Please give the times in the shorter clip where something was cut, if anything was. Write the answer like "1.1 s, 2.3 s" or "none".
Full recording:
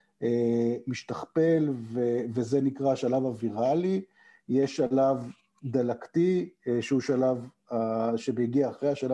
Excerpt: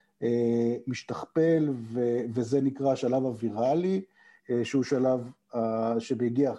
4.4 s